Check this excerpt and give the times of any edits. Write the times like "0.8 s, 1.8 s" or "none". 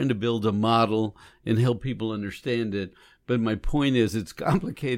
none